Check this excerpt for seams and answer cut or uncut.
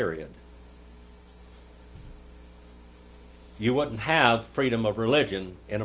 uncut